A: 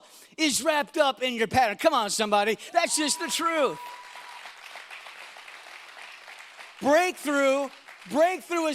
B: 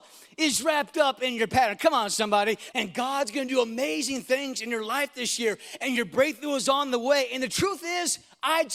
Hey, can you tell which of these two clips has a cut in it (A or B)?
B